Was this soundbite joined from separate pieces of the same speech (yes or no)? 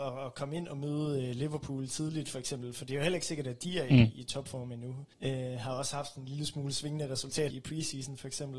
yes